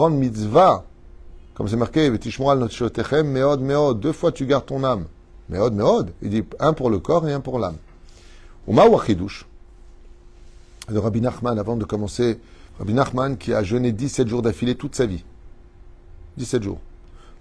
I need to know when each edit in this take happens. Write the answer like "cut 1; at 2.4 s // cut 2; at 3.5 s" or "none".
cut 1; at 12.7 s

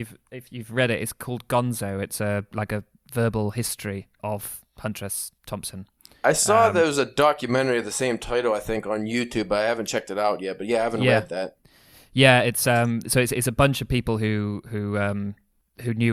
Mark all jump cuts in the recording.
cut 1; at 4.2 s

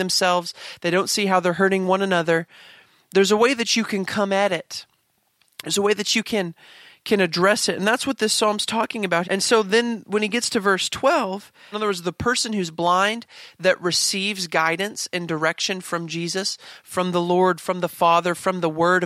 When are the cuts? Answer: cut 1; at 9.2 s // cut 2; at 11.7 s

